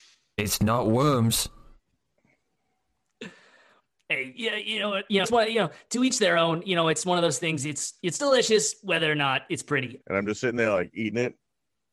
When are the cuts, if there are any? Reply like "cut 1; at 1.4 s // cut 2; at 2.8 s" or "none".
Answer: cut 1; at 5.2 s // cut 2; at 10.0 s